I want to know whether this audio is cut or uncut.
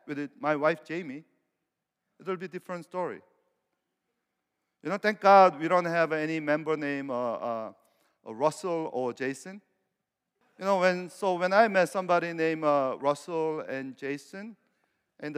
cut